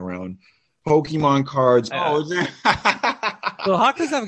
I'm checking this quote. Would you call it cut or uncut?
cut